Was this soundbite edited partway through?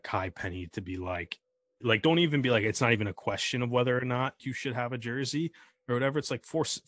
yes; 2 cuts; at 1.8 s, 4.4 s

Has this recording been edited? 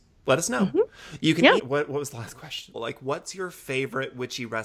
yes; 2 cuts; at 1.6 s, 2.7 s

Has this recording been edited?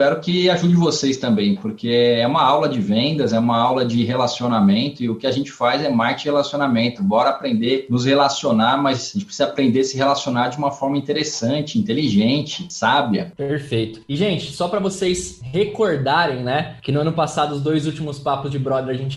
no; 0 cuts

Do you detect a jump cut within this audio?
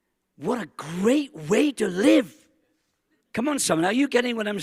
yes; 1 cut; at 3.2 s

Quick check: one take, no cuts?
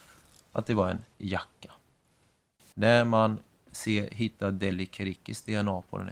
no; 1 cut; at 2.7 s

